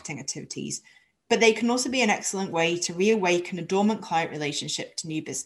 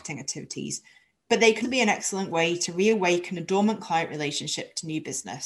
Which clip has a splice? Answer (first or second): second